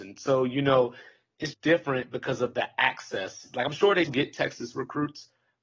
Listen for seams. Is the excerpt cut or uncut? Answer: cut